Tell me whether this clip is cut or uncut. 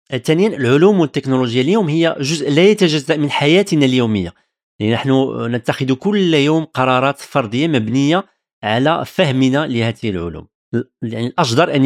uncut